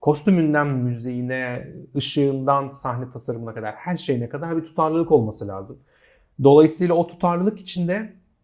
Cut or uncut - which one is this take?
uncut